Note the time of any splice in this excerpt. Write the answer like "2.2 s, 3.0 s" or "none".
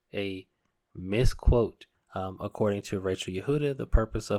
1.9 s